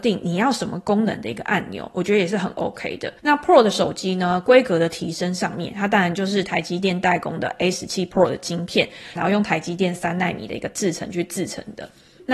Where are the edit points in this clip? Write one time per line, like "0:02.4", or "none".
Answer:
0:03.2
0:09.2

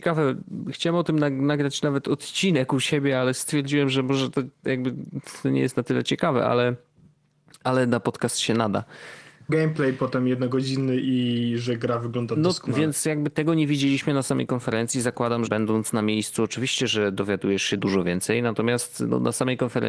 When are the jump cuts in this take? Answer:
0:09.5
0:15.5
0:17.8

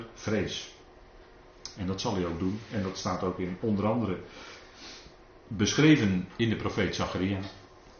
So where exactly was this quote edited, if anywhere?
0:01.7

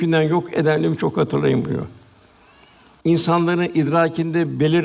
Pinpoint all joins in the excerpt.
0:01.0

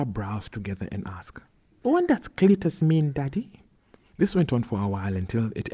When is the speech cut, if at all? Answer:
0:04.1

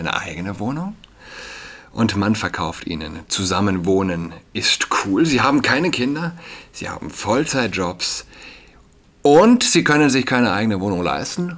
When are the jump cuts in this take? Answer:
none

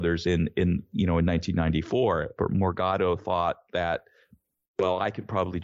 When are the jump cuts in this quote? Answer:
0:02.4

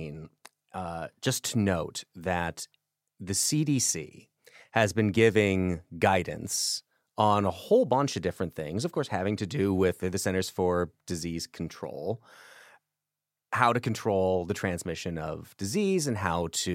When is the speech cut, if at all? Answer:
none

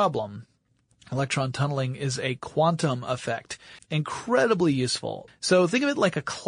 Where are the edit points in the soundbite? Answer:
0:03.8
0:05.3

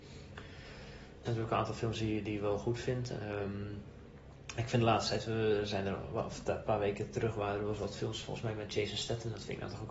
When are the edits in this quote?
0:01.2

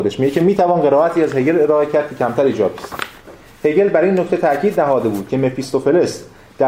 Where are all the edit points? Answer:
none

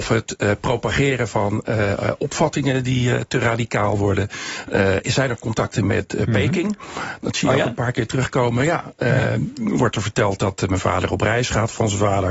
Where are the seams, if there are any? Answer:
none

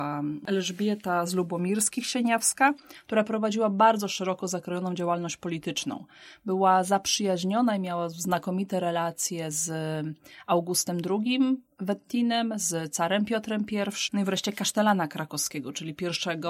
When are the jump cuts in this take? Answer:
0:14.1

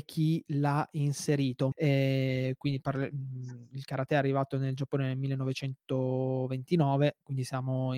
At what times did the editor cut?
0:01.7

